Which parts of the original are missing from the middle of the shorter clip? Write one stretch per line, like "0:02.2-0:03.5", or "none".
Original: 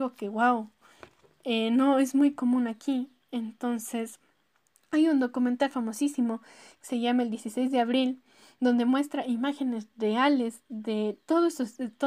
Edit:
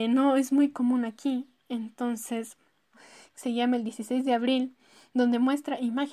0:04.6-0:06.4